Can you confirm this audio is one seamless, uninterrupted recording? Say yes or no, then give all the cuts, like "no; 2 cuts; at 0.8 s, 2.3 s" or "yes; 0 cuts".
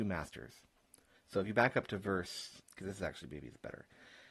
no; 2 cuts; at 1.2 s, 2.6 s